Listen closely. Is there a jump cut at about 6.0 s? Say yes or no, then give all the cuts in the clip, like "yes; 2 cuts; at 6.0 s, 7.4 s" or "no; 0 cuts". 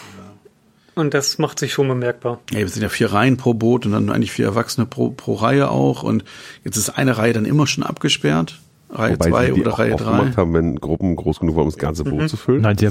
no; 0 cuts